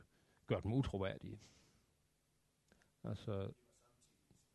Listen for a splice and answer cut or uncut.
uncut